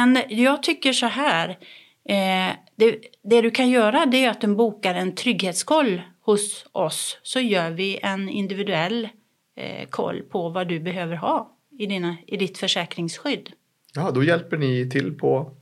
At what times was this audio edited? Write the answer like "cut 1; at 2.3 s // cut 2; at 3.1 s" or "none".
none